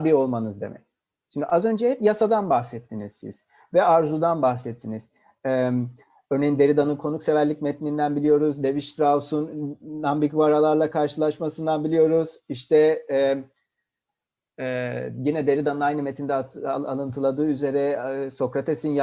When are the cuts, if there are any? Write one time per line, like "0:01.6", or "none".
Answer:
none

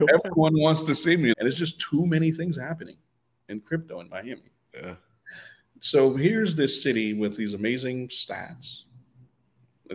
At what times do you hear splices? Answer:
0:01.3
0:04.7

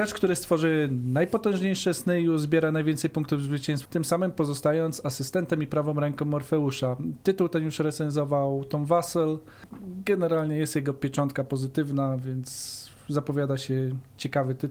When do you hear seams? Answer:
0:03.8

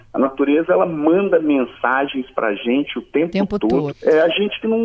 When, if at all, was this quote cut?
0:03.9

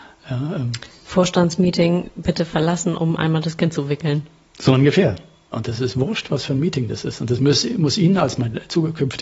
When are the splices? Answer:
0:05.5

